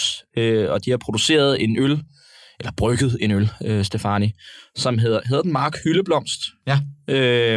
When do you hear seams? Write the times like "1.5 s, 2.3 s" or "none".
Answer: none